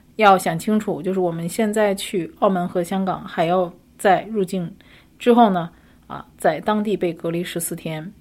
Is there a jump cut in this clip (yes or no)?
no